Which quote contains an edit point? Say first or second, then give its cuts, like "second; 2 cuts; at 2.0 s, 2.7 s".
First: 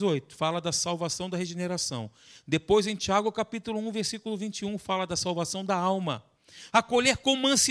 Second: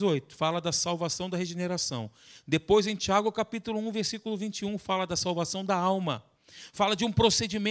first; 1 cut; at 6.7 s